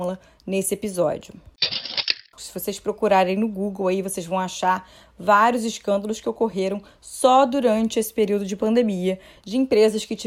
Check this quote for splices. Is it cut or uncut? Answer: cut